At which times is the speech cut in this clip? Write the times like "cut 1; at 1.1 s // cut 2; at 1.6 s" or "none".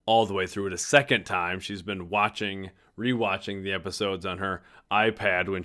none